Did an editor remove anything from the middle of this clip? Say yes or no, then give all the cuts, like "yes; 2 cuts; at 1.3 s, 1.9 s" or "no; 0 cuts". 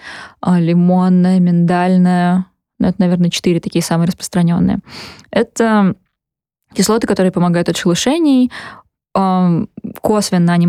no; 0 cuts